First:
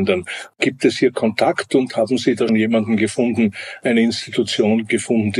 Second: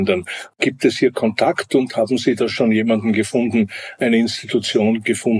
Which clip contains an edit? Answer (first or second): first